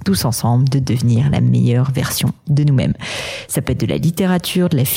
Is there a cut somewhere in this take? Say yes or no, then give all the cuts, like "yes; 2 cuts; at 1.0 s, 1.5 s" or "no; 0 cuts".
no; 0 cuts